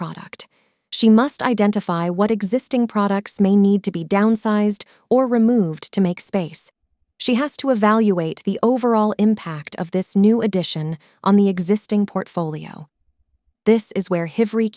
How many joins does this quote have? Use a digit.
0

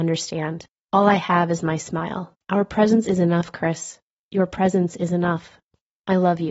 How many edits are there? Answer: 1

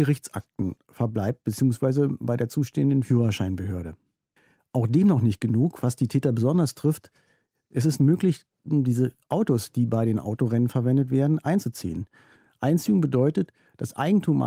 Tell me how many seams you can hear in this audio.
0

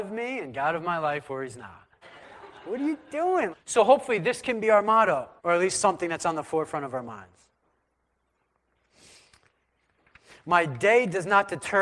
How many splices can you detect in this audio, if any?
3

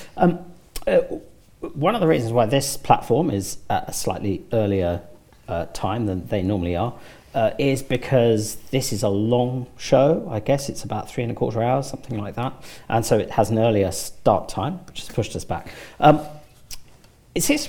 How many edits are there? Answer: 0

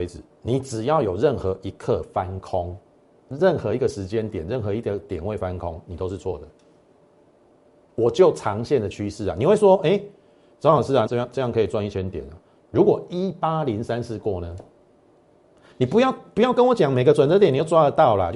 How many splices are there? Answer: 2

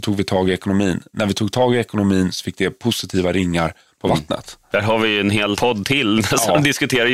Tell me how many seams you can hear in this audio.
1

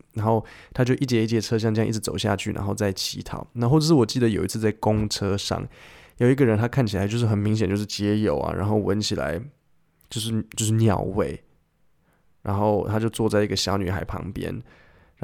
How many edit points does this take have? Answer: 0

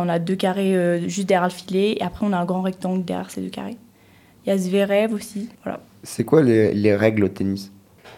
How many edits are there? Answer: 2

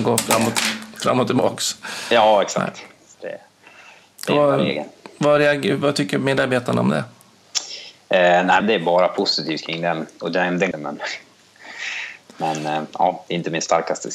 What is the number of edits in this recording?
2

